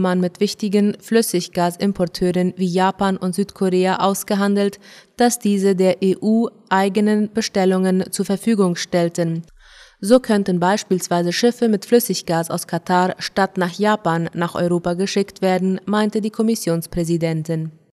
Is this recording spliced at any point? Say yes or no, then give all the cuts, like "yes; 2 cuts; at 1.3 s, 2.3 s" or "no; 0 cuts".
no; 0 cuts